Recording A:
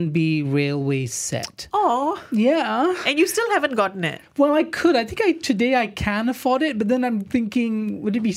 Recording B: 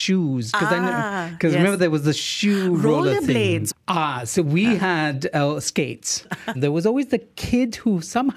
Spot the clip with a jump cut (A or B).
B